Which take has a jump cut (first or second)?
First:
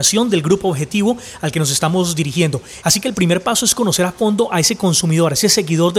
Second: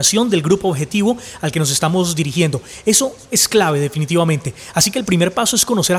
first